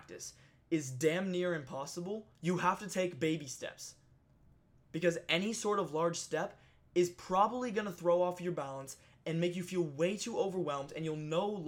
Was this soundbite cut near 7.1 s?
no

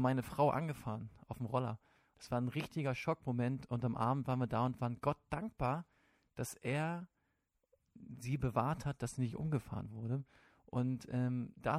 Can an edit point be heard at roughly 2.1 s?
yes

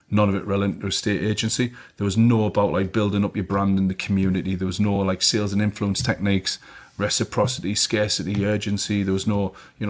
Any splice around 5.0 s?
no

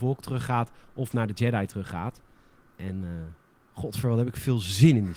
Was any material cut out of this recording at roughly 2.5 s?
no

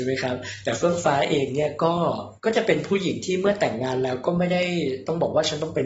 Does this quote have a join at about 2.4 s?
yes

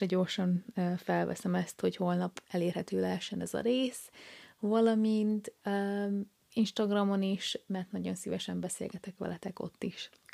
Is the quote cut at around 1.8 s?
no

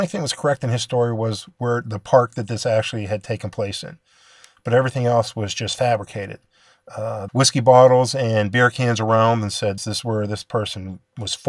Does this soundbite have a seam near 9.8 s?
yes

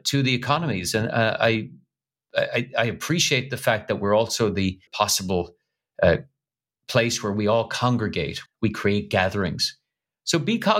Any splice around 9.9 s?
no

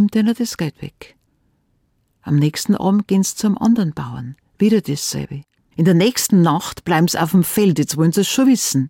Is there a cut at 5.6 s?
yes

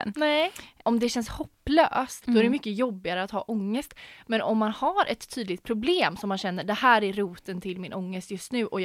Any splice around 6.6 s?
no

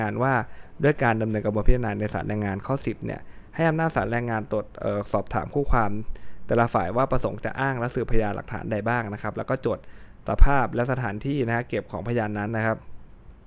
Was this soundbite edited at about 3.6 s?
no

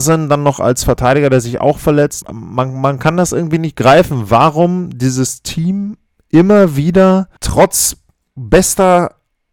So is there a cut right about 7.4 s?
yes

